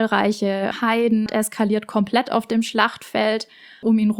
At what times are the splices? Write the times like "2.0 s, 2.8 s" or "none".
1.3 s